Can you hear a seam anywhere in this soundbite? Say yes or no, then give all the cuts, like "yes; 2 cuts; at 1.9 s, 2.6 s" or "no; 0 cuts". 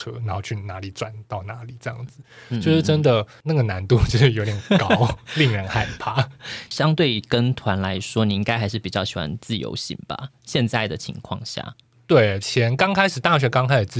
no; 0 cuts